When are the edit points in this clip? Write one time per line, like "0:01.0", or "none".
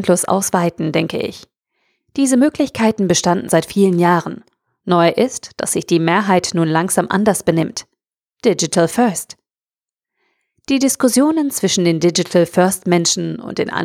0:03.5